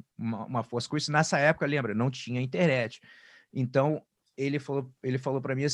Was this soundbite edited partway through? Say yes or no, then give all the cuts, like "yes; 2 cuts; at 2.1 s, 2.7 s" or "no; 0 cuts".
no; 0 cuts